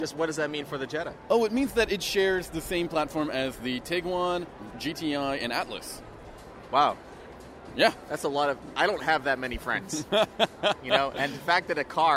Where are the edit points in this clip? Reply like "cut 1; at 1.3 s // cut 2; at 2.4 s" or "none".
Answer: cut 1; at 4.7 s